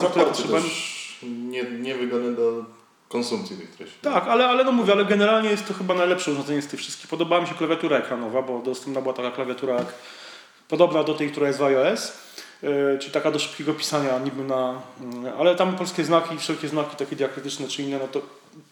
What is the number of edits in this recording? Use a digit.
0